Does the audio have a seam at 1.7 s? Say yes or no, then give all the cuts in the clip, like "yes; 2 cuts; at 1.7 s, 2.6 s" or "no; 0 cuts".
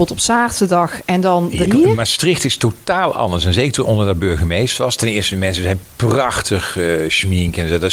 yes; 1 cut; at 1.7 s